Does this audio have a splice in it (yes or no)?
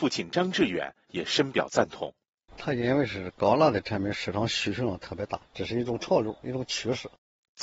yes